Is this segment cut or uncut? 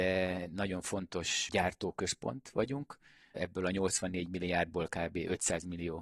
uncut